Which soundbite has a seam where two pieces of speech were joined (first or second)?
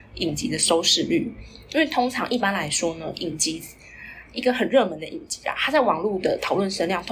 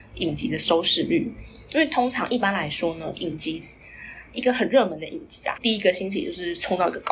second